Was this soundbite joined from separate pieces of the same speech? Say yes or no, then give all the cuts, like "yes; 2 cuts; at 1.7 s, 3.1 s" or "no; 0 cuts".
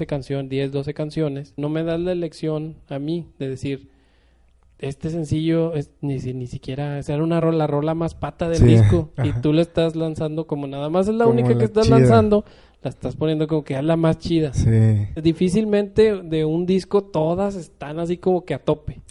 no; 0 cuts